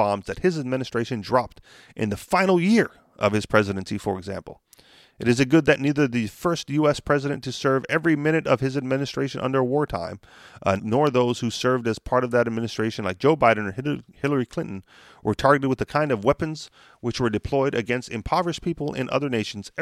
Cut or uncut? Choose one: cut